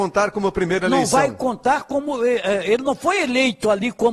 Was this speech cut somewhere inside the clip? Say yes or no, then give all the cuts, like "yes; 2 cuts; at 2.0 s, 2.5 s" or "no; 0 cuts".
no; 0 cuts